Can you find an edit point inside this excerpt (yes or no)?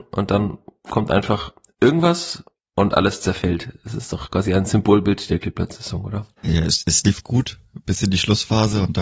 yes